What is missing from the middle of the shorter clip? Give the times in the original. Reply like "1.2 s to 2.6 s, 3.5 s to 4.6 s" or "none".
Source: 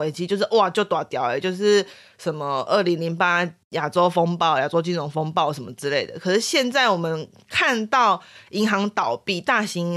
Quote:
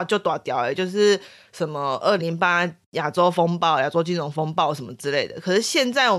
2.8 s to 3.0 s